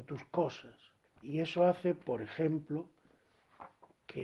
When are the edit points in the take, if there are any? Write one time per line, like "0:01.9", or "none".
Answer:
0:01.0